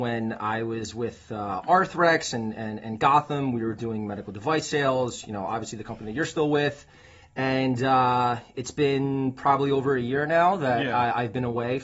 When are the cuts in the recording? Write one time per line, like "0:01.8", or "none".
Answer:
none